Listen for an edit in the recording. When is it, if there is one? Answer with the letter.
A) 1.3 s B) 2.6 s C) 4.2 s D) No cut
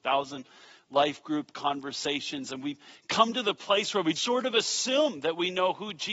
C